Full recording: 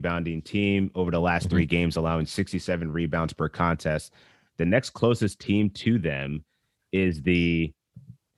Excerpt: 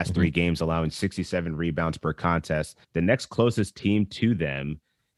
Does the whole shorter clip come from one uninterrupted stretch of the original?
no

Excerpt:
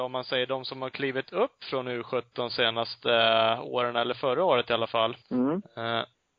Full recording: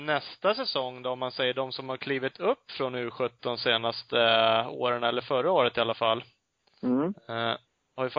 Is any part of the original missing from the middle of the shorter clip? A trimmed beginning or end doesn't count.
yes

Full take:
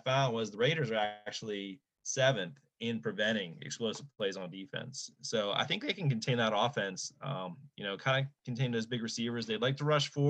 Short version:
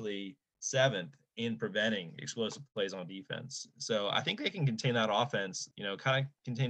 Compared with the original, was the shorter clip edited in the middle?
yes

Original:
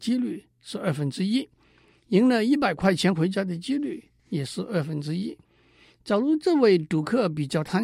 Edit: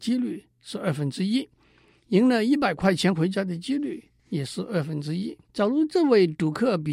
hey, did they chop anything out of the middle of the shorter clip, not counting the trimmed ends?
yes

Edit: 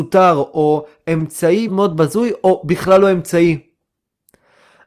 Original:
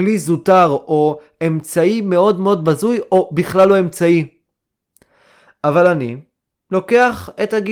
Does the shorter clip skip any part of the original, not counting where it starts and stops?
yes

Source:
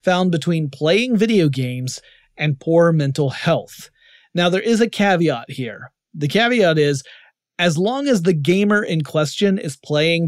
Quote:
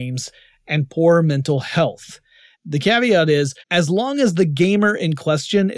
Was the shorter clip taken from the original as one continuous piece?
no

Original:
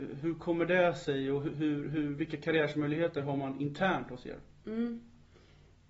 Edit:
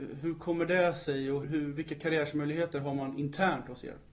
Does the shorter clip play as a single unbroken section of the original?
no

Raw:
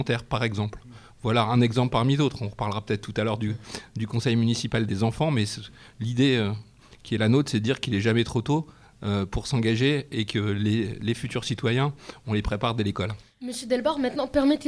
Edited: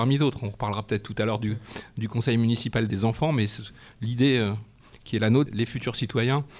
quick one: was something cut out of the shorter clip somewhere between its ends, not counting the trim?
yes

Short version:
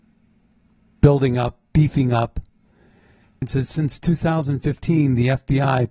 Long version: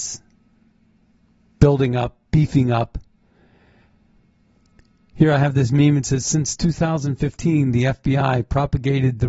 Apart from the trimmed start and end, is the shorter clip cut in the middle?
yes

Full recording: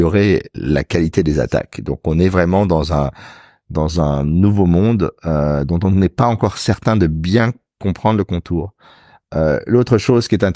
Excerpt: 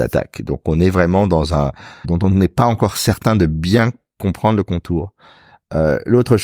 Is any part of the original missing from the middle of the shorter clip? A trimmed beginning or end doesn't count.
yes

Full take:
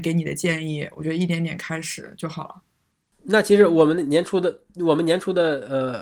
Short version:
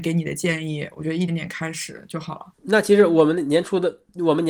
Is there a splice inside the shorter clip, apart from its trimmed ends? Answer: yes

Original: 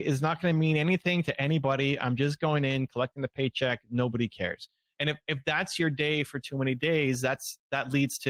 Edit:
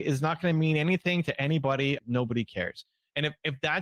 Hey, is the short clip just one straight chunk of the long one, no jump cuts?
no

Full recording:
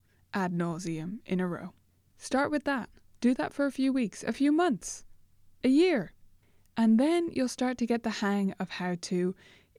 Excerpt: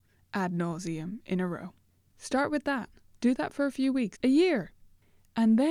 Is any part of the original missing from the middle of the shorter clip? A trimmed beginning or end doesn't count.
yes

